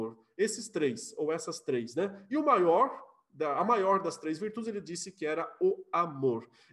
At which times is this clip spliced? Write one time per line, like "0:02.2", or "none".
none